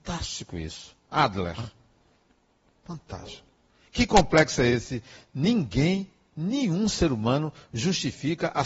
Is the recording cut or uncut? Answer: uncut